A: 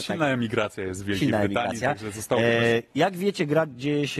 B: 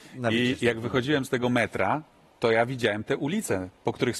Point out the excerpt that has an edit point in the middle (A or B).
A